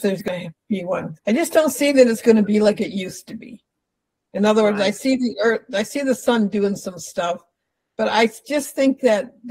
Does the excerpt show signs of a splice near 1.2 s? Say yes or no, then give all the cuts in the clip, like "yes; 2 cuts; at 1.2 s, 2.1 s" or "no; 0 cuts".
yes; 1 cut; at 1.2 s